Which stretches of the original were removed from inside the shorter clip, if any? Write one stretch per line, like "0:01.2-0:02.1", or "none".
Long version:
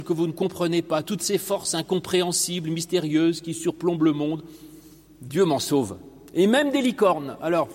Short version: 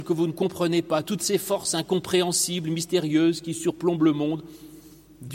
none